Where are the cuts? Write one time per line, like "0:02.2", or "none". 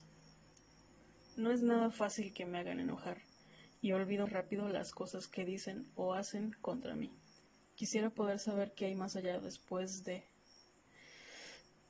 0:04.3
0:07.7